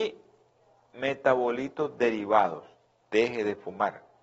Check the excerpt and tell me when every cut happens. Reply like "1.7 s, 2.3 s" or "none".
3.0 s